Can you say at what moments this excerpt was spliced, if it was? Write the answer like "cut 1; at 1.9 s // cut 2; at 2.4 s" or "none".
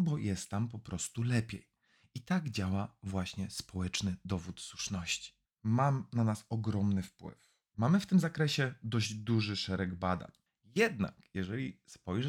cut 1; at 5.5 s // cut 2; at 10.5 s